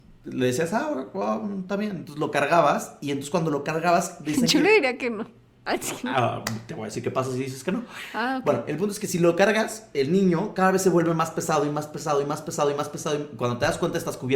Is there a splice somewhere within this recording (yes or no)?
no